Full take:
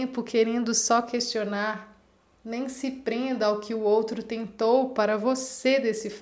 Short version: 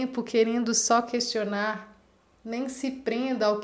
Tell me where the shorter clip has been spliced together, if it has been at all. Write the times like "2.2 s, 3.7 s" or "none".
none